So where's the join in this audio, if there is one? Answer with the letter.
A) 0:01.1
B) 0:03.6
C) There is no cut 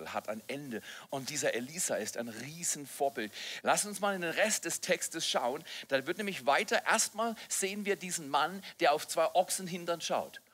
B